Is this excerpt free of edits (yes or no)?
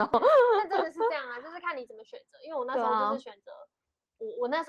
yes